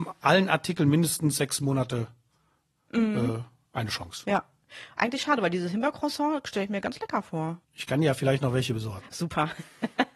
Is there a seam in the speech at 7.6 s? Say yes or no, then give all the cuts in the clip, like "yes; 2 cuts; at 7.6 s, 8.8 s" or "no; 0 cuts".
yes; 1 cut; at 7.6 s